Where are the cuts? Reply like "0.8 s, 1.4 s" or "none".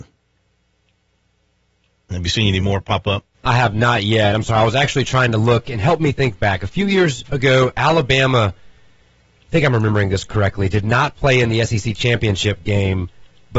3.3 s